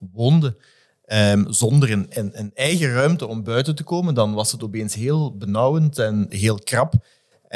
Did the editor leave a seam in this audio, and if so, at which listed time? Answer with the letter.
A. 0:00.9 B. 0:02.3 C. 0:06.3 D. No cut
C